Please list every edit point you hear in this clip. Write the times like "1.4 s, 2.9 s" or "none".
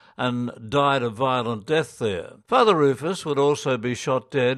2.4 s